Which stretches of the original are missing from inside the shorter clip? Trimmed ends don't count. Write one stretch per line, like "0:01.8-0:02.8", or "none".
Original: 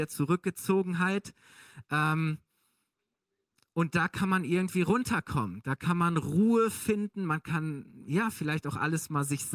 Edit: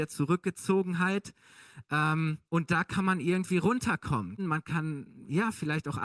0:02.5-0:03.7
0:05.6-0:07.2

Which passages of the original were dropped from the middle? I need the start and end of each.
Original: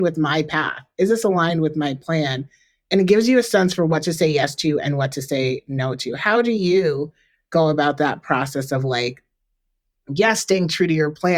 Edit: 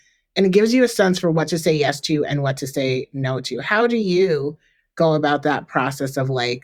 none

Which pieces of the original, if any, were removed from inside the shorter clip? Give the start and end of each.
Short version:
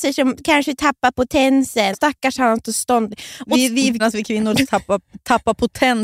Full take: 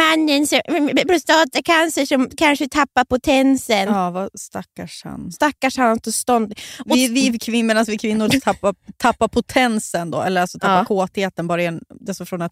0:03.9-0:05.3
0:07.4-0:07.7

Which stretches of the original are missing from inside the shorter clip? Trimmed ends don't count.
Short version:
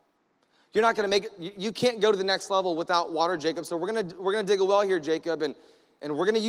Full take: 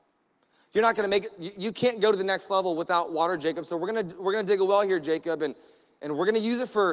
none

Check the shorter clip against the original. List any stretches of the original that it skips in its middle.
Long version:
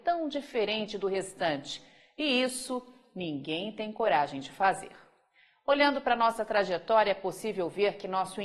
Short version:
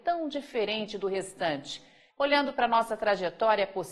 0:02.1-0:05.6

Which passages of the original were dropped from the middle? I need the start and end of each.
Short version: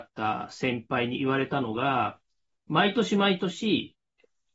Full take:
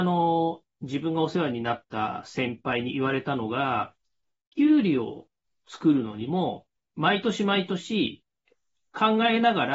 0:04.3-0:06.8

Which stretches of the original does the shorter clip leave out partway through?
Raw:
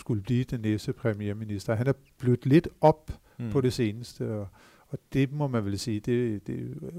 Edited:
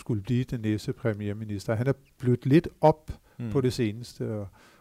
none

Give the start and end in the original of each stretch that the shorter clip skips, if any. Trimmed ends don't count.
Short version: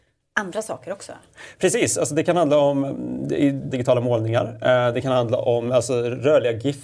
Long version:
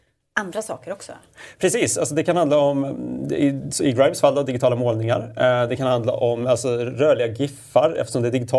0:03.7-0:04.5

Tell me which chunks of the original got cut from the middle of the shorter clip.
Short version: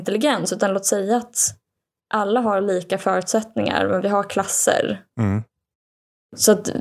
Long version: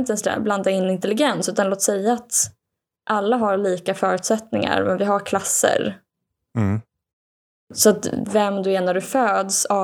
0:06.1-0:06.5

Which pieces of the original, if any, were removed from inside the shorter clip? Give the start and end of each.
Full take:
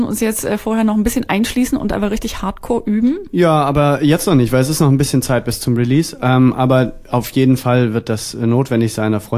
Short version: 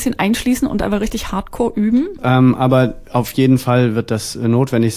0:03.3-0:06.2

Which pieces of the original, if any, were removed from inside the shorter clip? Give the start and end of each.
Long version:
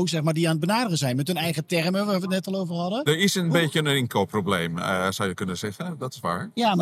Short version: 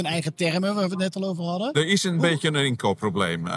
none

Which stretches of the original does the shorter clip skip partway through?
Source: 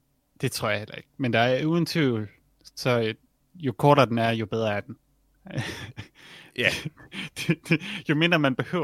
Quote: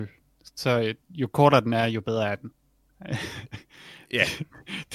0:03.2-0:03.5

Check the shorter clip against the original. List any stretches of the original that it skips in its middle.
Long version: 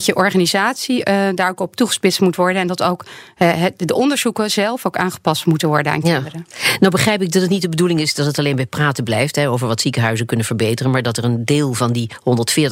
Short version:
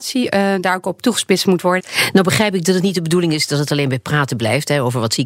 0:02.5-0:06.5

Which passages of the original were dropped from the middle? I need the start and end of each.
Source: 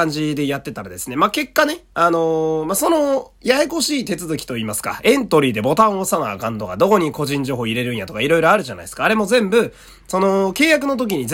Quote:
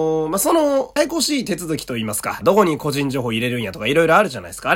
0:03.3-0:03.6
0:05.0-0:06.8

